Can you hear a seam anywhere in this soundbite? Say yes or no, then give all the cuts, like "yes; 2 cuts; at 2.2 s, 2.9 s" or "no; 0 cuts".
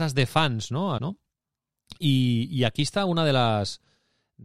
yes; 1 cut; at 1.0 s